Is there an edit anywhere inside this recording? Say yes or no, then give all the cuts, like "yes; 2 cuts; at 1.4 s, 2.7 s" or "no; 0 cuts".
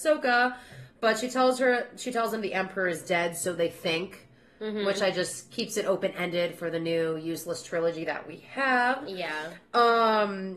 no; 0 cuts